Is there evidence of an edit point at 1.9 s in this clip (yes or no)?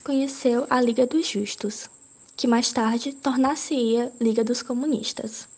no